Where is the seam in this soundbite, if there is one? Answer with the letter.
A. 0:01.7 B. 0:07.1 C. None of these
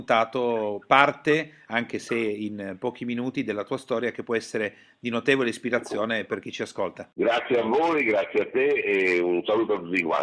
C